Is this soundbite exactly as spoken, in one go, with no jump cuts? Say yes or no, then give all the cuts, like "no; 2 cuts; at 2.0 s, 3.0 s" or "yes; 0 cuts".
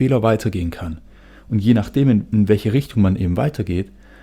yes; 0 cuts